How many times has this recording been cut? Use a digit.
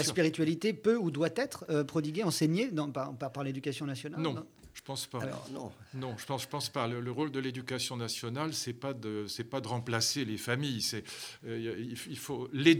0